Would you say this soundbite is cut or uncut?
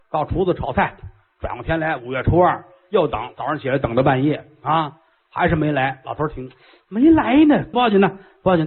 cut